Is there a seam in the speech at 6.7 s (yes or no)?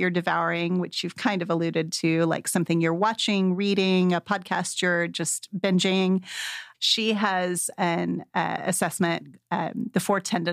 yes